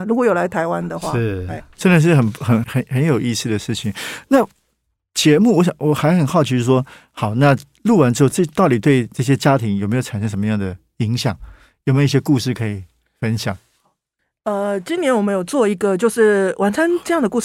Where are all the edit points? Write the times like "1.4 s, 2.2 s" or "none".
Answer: 2.6 s